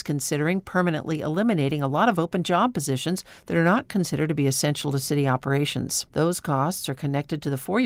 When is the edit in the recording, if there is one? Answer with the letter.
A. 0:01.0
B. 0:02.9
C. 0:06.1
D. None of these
C